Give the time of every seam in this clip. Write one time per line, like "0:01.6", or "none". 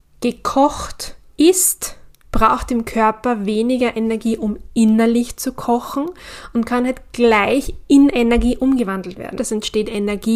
0:09.4